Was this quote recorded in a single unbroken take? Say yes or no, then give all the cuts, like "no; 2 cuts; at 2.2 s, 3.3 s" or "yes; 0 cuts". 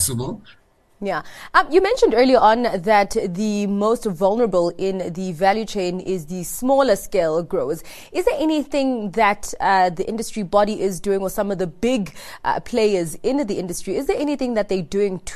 no; 1 cut; at 1.0 s